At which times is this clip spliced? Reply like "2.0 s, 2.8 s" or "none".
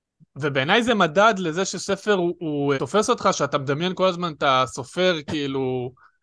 2.7 s